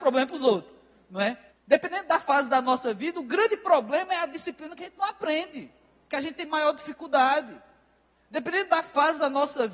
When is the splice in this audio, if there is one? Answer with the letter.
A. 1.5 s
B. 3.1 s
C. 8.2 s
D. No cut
A